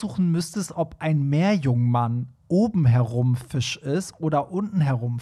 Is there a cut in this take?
no; 0 cuts

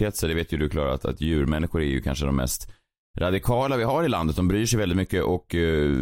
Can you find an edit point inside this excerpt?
no; 0 cuts

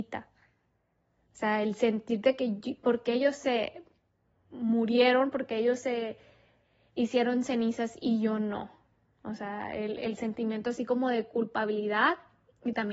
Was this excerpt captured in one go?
yes; 0 cuts

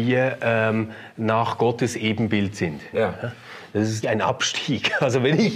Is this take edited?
yes; 2 cuts; at 2.9 s, 4.0 s

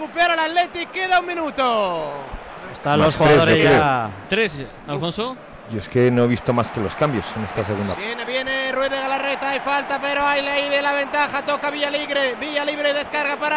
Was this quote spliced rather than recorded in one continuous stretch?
yes; 1 cut; at 8.0 s

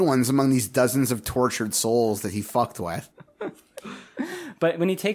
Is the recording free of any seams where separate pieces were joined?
no; 1 cut; at 3.1 s

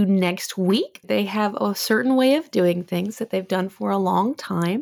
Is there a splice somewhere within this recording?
yes; 1 cut; at 1.0 s

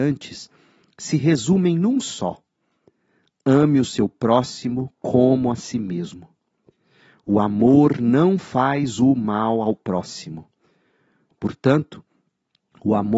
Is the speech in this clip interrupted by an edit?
no; 0 cuts

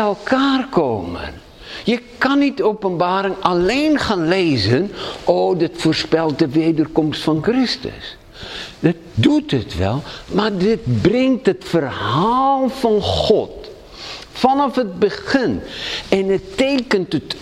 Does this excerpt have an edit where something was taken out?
no; 0 cuts

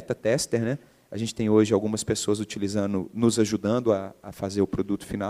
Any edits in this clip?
no; 0 cuts

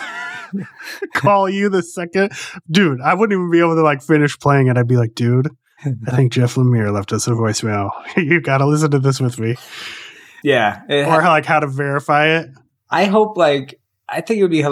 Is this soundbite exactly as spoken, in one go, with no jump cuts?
no; 1 cut; at 10.4 s

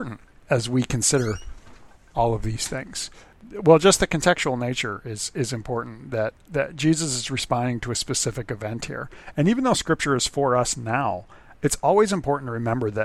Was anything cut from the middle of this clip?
no; 0 cuts

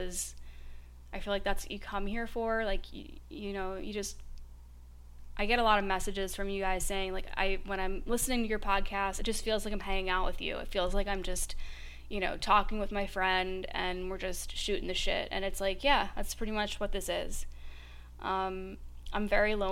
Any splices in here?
no; 0 cuts

